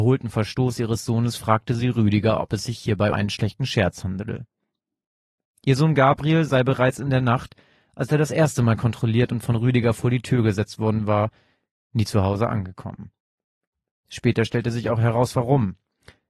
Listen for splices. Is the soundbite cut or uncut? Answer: cut